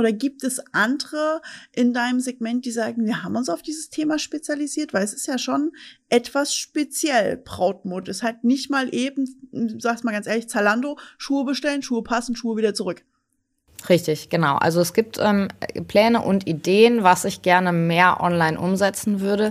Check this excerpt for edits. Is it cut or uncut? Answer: uncut